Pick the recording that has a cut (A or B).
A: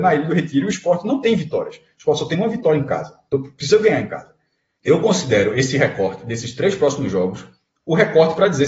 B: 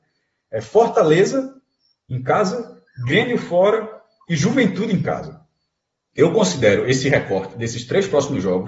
A